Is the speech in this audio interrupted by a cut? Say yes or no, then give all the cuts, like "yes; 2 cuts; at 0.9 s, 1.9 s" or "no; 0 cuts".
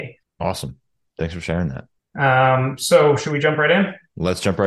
no; 0 cuts